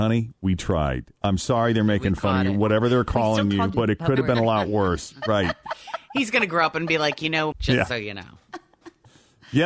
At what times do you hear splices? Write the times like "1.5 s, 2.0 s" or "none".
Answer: 3.7 s, 7.5 s